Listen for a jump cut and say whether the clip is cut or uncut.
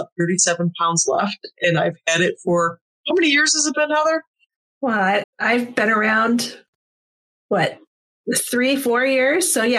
cut